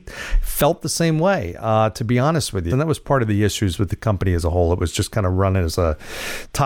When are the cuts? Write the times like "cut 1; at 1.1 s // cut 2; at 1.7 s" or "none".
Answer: cut 1; at 2.7 s

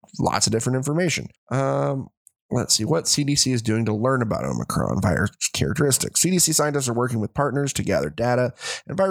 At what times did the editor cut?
none

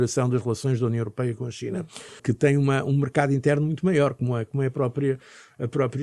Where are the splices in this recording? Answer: cut 1; at 2.2 s

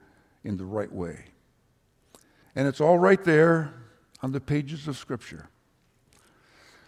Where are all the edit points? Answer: cut 1; at 2.4 s

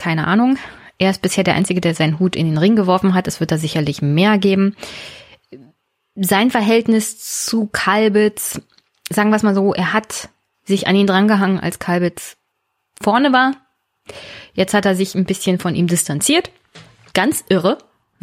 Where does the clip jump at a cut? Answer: cut 1; at 17.1 s

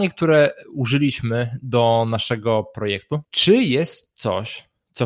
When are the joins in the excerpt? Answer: cut 1; at 3.2 s

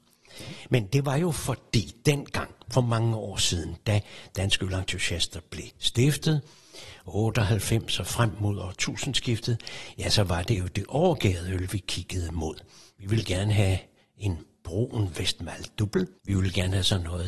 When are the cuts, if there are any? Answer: cut 1; at 16.2 s

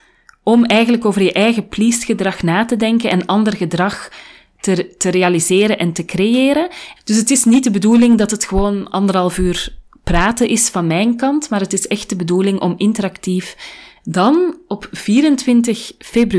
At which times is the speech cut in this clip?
cut 1; at 7.0 s // cut 2; at 14.0 s

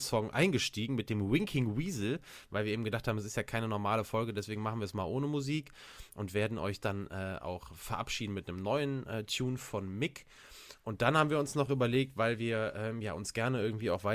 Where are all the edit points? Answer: none

